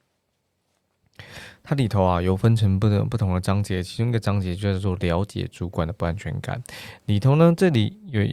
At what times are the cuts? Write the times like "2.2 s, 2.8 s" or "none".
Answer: none